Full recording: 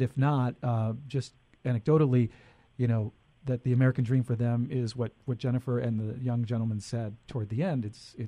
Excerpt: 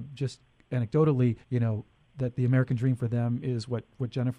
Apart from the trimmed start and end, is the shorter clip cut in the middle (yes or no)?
yes